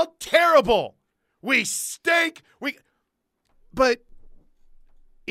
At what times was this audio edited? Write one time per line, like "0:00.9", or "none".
none